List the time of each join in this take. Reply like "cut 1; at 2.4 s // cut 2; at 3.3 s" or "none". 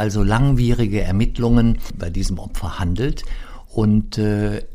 cut 1; at 2.0 s